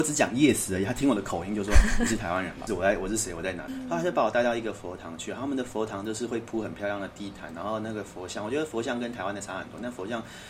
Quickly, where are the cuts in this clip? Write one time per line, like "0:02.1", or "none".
0:02.7
0:03.7